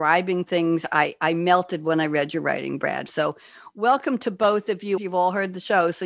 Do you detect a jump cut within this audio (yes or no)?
yes